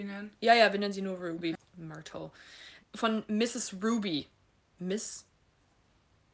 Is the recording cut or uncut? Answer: cut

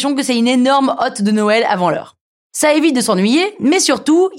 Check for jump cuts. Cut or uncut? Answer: uncut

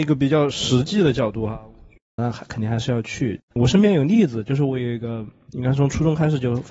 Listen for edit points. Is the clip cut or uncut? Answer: cut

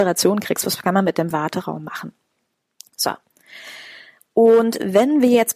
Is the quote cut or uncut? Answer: uncut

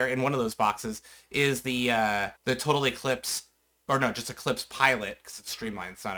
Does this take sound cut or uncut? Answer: cut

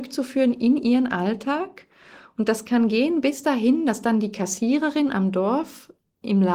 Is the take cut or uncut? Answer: uncut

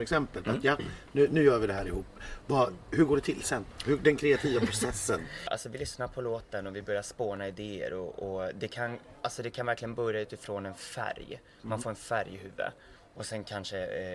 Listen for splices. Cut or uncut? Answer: uncut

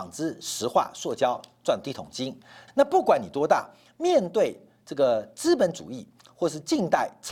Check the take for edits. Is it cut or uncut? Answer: cut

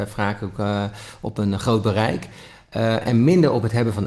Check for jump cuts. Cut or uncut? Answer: uncut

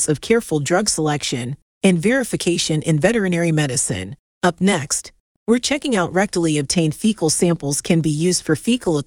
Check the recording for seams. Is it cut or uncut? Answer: cut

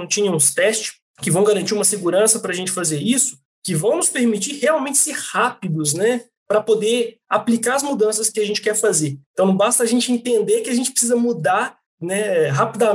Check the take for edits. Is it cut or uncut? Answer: uncut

